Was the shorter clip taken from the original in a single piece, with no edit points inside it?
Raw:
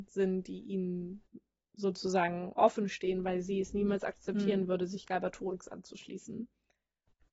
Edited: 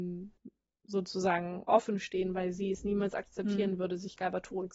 yes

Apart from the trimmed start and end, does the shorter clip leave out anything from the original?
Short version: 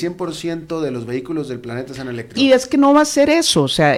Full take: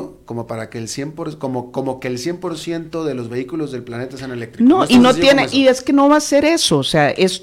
yes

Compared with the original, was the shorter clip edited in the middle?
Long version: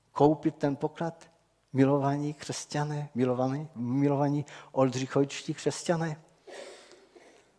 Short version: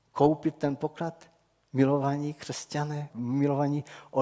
yes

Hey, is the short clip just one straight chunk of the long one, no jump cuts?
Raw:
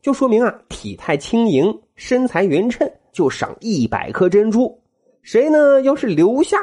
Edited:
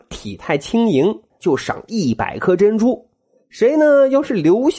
no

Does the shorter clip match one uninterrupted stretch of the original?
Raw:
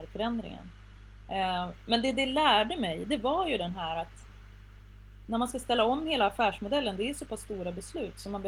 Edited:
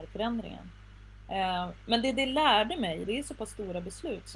no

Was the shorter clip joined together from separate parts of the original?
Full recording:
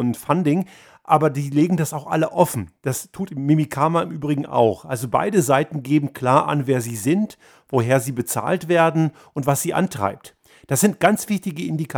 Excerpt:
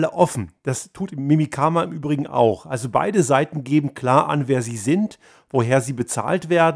no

